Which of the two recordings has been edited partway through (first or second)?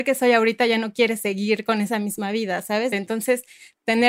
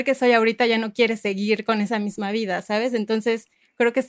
first